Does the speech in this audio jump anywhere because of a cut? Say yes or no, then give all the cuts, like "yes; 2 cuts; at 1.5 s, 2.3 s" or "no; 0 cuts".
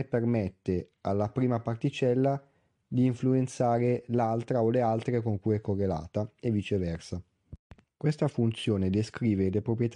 yes; 1 cut; at 7.8 s